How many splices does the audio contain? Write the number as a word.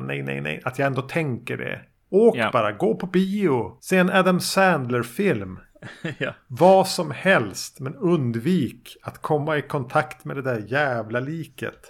zero